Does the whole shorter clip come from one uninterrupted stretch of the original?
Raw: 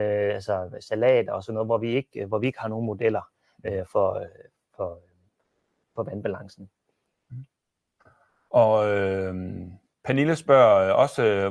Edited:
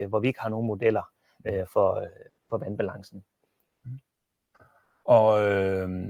no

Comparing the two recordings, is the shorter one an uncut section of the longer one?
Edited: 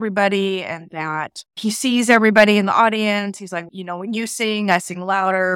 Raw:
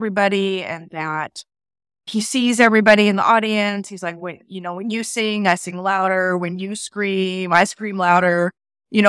no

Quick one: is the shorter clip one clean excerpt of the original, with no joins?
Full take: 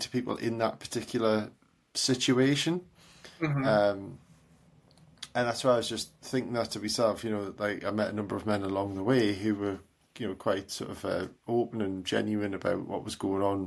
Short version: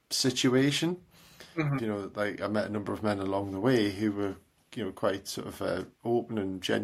no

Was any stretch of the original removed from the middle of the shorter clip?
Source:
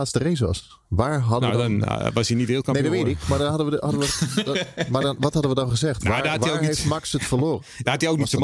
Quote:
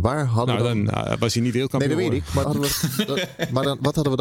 yes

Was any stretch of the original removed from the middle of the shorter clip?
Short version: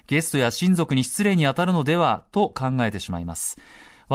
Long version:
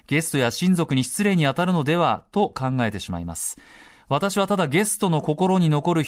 no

